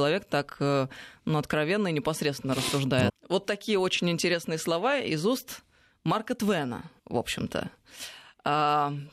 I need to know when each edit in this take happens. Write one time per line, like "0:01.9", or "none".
0:03.1
0:07.0